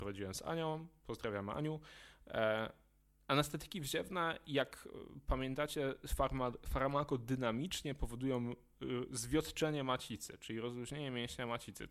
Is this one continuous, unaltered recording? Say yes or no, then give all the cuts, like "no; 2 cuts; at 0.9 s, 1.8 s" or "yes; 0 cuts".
yes; 0 cuts